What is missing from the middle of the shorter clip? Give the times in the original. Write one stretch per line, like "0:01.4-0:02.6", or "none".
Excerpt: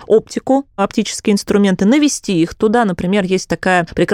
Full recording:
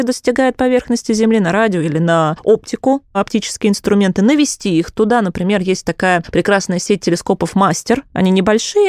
none